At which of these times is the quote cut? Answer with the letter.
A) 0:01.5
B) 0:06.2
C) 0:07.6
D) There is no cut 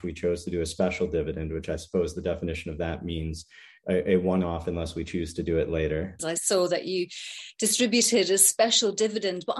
B